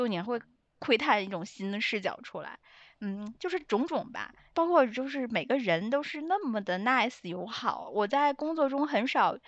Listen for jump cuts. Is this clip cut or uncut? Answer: uncut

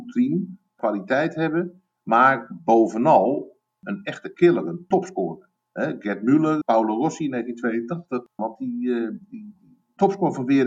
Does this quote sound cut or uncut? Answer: cut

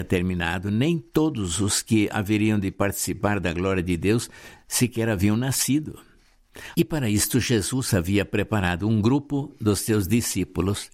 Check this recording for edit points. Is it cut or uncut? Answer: cut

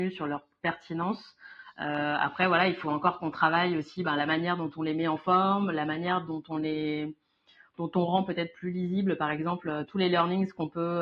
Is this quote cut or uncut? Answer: uncut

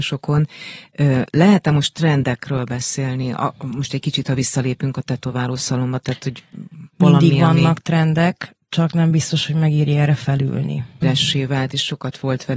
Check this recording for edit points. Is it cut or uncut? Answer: cut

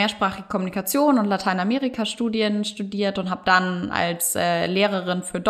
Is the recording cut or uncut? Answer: uncut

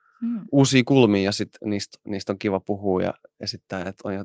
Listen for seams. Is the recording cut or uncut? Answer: uncut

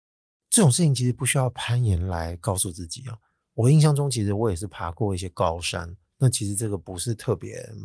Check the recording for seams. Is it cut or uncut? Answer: uncut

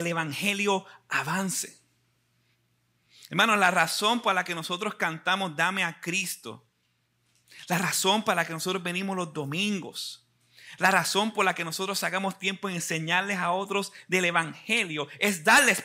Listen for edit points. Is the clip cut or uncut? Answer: uncut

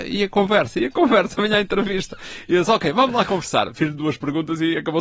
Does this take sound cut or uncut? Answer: uncut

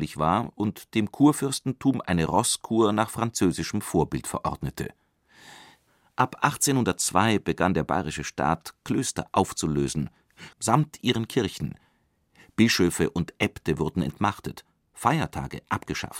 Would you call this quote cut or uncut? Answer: cut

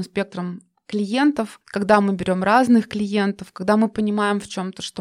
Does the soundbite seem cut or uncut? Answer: uncut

